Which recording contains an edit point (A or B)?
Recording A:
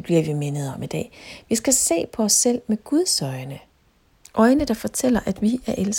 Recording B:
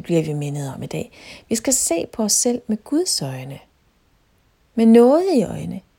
A